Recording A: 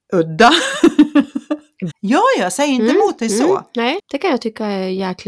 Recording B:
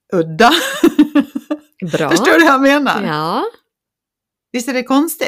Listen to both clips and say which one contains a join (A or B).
A